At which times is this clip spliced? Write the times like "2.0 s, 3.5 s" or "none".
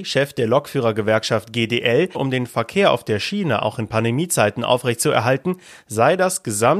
2.1 s